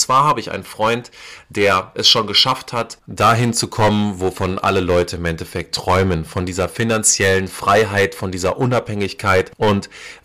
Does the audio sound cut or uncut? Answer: uncut